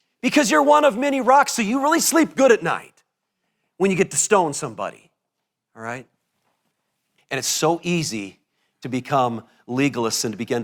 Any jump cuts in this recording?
yes; 1 cut; at 7.2 s

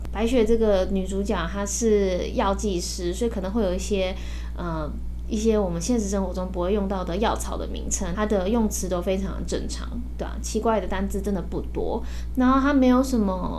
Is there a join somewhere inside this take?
yes; 2 cuts; at 8.1 s, 12.3 s

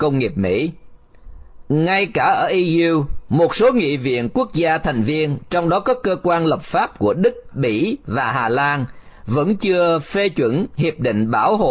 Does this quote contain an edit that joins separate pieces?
yes; 1 cut; at 7.5 s

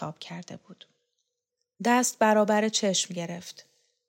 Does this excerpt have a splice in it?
no; 0 cuts

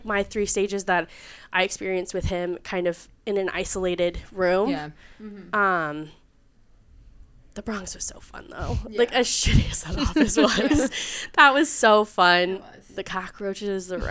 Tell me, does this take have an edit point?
no; 0 cuts

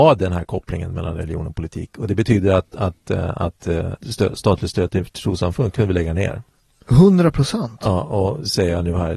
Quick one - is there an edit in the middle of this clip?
yes; 1 cut; at 4.0 s

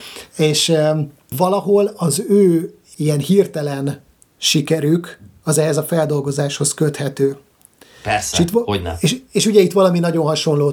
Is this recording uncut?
yes; 0 cuts

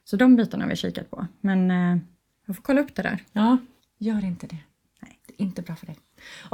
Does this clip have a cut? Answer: yes; 1 cut; at 3.8 s

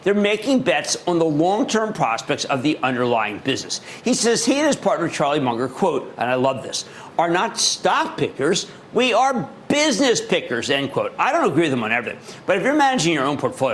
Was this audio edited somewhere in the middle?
no; 0 cuts

